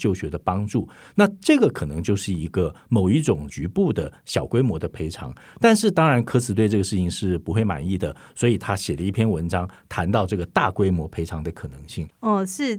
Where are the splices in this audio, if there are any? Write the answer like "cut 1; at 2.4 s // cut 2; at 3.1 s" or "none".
none